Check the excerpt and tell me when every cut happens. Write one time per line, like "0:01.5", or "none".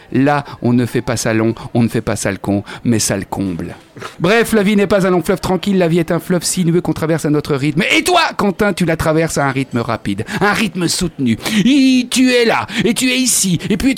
0:04.1